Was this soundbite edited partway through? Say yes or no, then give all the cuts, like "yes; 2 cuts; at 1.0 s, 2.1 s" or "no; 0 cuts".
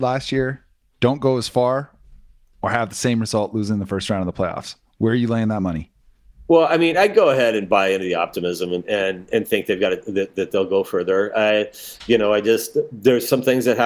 no; 0 cuts